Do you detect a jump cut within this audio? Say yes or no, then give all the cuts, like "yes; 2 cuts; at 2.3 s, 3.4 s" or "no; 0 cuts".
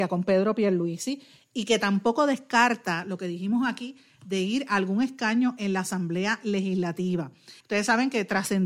yes; 1 cut; at 7.6 s